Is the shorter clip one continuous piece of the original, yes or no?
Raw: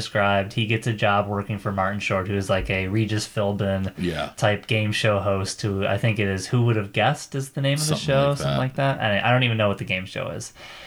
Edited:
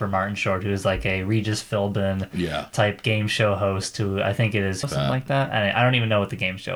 no